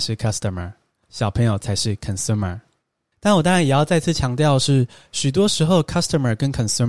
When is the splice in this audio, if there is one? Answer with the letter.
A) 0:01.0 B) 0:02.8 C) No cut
A